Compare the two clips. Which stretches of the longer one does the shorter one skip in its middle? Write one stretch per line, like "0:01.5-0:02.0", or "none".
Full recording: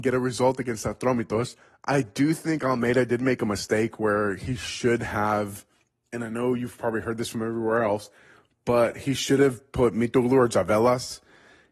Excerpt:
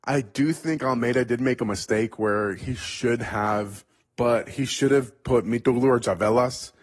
0:05.9-0:08.5